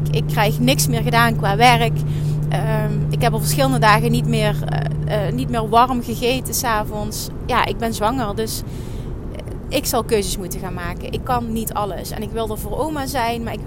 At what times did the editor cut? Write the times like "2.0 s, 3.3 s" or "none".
none